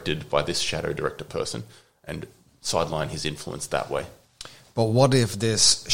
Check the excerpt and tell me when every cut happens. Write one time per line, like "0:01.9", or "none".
none